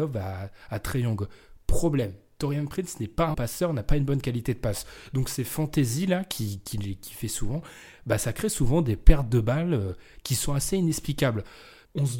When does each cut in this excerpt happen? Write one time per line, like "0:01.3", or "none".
0:03.3